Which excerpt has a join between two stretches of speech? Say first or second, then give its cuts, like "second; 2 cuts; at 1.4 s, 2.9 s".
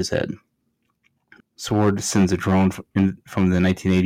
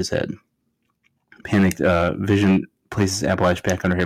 first; 1 cut; at 1.4 s